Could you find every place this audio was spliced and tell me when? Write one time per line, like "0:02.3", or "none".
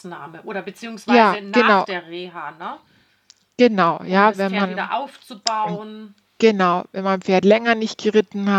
none